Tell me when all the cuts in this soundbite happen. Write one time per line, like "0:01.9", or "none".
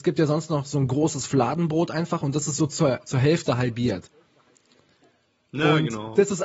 none

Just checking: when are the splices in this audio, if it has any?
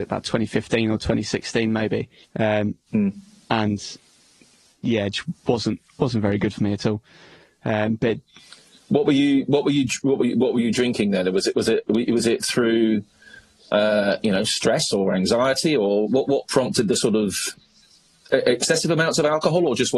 0:02.2

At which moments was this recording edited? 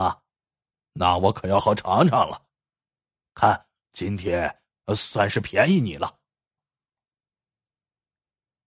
0:01.6
0:03.9
0:06.6

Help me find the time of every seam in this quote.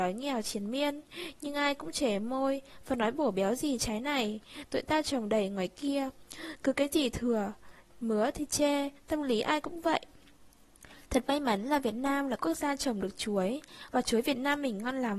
none

